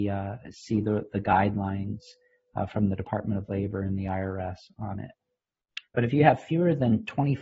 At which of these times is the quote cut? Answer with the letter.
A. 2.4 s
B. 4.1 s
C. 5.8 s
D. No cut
C